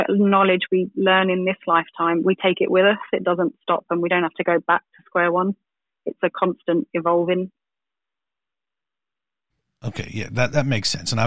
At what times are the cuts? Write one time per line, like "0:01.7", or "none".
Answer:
none